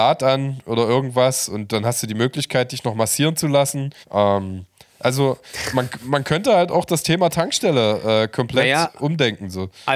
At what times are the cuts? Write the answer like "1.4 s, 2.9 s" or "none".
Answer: 4.0 s